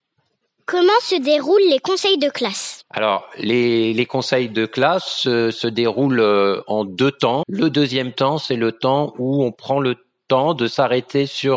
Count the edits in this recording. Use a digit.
2